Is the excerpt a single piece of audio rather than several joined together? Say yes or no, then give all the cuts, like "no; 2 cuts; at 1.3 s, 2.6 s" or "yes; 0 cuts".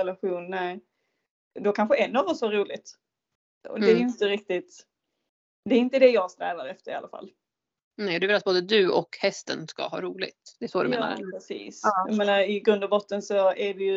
yes; 0 cuts